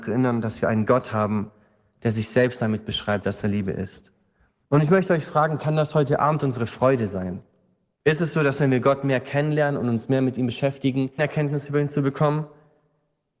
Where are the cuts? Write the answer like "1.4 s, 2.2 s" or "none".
8.0 s, 11.2 s